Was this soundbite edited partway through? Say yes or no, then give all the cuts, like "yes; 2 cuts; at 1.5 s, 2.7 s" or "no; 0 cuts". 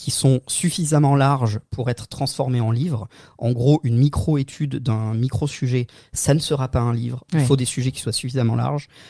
yes; 1 cut; at 7.3 s